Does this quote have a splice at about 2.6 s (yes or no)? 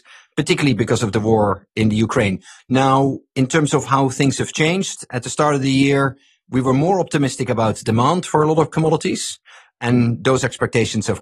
yes